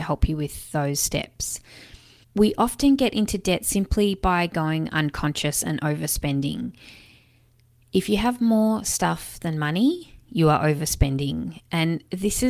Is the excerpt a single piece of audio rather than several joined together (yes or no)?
no